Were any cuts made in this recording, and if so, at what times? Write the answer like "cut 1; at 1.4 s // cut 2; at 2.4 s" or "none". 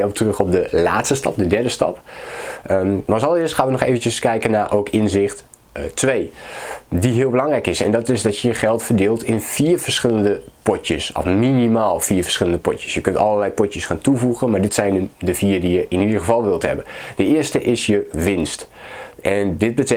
none